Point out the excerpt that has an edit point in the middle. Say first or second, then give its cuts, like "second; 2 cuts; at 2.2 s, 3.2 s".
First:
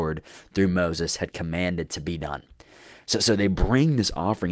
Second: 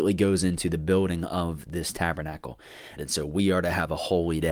second; 1 cut; at 3.0 s